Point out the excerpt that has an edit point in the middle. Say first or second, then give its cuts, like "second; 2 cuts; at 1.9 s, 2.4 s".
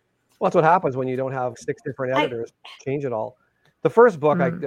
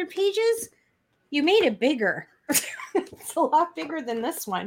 first; 1 cut; at 1.5 s